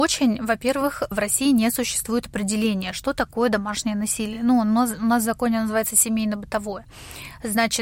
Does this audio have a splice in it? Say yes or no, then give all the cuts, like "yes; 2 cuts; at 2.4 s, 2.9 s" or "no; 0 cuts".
no; 0 cuts